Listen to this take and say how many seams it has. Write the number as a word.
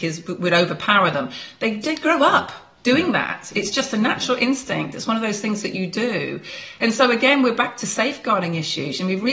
zero